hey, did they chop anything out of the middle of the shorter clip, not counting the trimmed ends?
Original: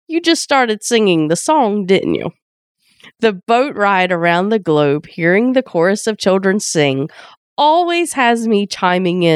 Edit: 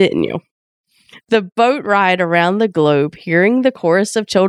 no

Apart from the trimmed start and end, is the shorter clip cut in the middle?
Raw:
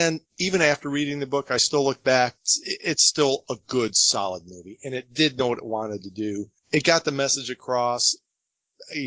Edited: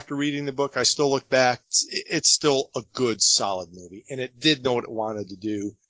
no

